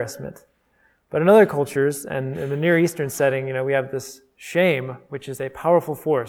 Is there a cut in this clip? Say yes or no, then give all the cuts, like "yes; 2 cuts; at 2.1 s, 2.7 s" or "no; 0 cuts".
no; 0 cuts